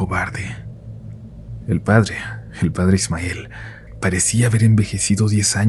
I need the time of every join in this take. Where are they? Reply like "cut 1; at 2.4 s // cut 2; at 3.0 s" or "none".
cut 1; at 1.6 s